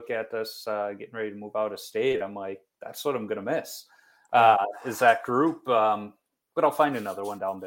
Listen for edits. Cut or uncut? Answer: uncut